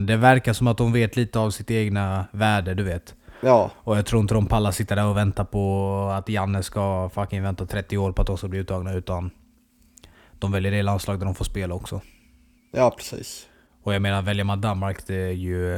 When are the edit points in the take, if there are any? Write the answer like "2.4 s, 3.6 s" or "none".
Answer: none

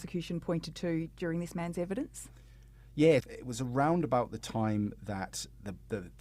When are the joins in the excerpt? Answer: 3.2 s

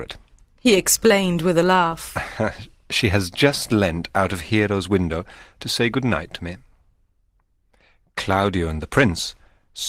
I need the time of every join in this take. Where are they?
none

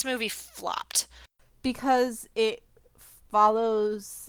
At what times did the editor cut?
none

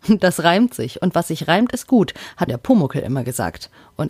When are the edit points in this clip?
2.5 s

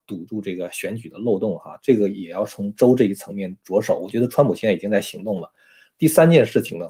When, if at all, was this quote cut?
none

